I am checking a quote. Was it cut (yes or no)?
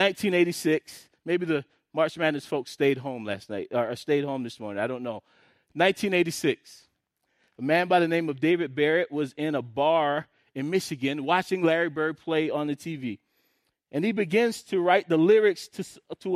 no